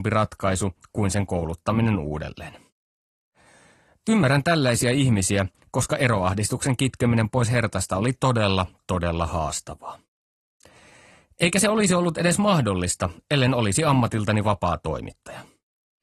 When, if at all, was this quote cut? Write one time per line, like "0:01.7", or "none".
none